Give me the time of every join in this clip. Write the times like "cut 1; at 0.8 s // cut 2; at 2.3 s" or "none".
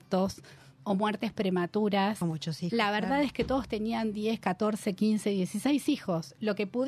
none